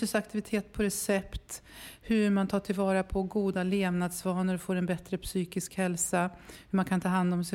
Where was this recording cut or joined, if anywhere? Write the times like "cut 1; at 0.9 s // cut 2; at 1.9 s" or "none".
none